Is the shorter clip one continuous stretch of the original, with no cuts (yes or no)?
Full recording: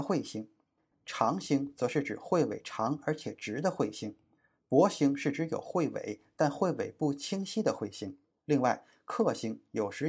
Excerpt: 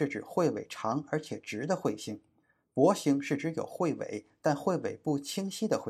yes